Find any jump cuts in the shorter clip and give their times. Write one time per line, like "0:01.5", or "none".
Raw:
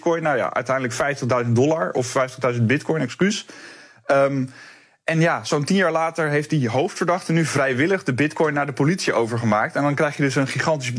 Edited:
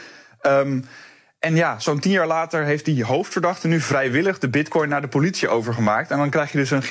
none